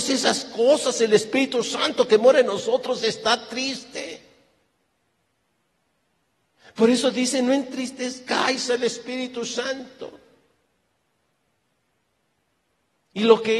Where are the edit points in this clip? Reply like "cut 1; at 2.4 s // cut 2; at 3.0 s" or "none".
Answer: none

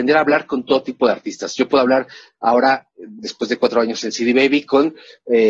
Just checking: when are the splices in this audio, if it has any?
none

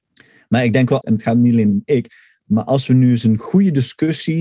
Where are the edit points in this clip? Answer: cut 1; at 1.0 s

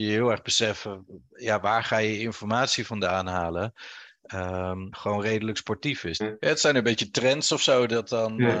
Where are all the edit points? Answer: cut 1; at 4.9 s // cut 2; at 6.2 s

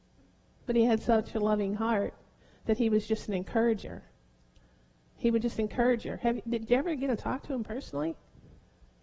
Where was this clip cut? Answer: none

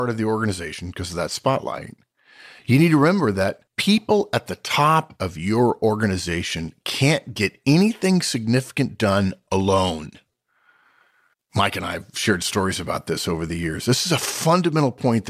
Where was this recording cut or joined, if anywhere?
cut 1; at 3.7 s

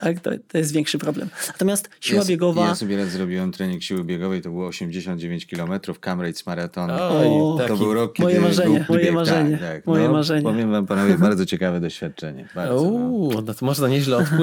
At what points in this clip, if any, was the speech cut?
cut 1; at 8.9 s

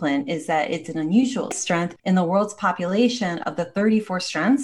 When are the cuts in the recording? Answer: cut 1; at 2.0 s

